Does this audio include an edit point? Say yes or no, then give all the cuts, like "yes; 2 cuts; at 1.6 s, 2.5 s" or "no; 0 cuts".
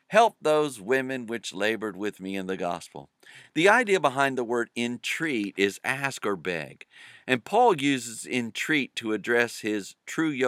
no; 0 cuts